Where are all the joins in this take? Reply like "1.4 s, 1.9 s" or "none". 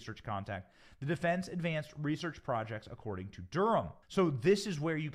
4.0 s